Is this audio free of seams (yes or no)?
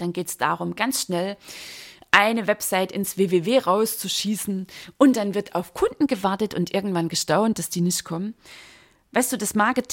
yes